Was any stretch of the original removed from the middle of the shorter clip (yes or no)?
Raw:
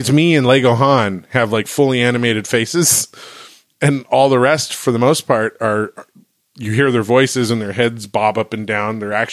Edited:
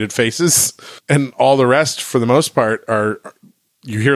yes